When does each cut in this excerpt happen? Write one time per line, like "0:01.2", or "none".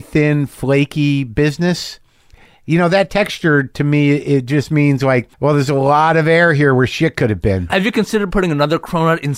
0:05.3
0:07.7

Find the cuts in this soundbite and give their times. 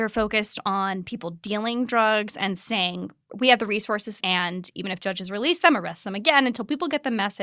0:04.2

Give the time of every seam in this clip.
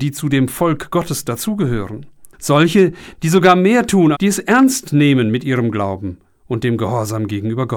0:02.3
0:04.1

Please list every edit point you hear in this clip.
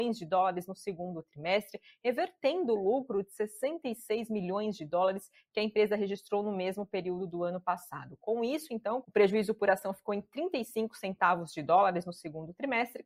0:09.0

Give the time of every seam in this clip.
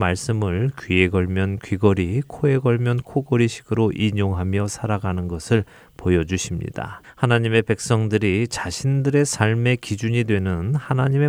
0:07.0

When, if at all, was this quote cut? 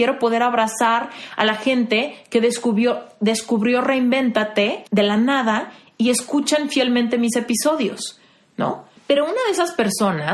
0:04.9
0:09.0

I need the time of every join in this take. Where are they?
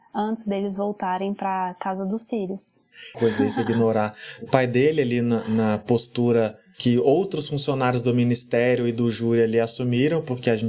0:03.1

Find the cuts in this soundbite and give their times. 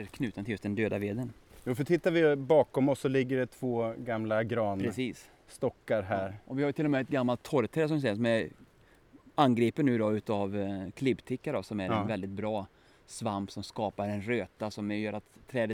none

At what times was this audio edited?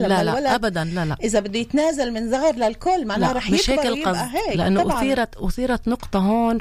none

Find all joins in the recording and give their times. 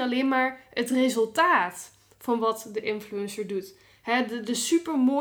none

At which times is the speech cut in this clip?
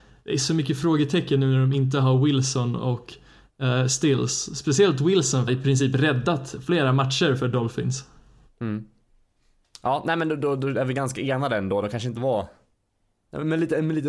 0:05.5

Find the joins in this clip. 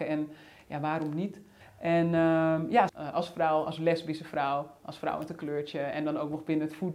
0:01.6
0:02.9

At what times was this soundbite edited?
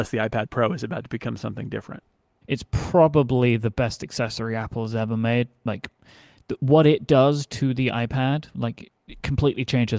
0:02.4

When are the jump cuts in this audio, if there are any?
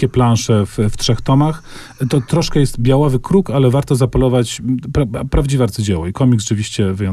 none

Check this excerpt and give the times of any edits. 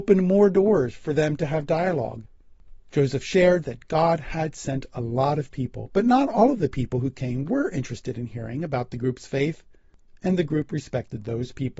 none

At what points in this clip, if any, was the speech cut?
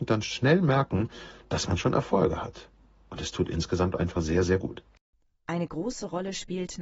none

